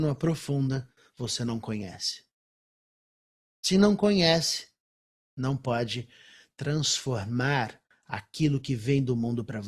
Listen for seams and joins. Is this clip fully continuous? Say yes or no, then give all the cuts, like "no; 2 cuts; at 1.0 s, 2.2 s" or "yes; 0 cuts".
yes; 0 cuts